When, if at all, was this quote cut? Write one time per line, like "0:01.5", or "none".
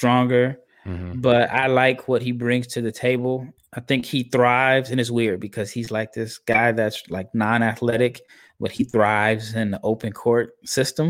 0:03.6